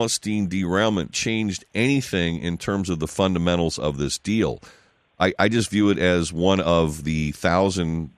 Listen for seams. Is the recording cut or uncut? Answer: cut